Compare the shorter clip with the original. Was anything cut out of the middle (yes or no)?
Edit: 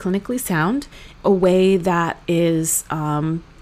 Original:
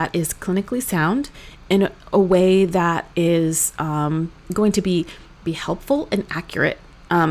yes